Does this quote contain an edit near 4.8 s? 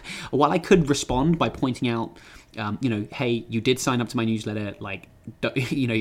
no; 0 cuts

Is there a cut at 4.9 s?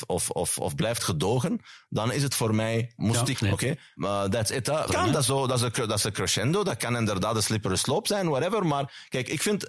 yes; 2 cuts; at 3.3 s, 4.9 s

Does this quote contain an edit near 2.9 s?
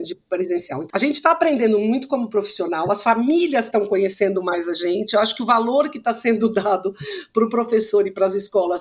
no; 1 cut; at 0.9 s

